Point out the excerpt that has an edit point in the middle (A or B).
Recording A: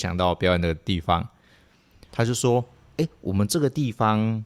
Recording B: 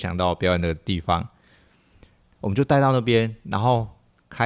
A